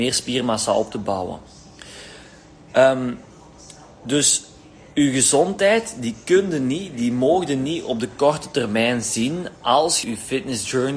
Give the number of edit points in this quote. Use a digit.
1